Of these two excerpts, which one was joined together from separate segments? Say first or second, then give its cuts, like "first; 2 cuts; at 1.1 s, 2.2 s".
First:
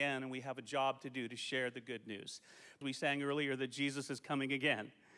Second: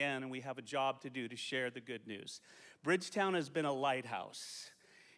first; 1 cut; at 2.8 s